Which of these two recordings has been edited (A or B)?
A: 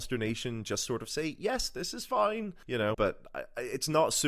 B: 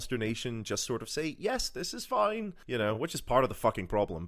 A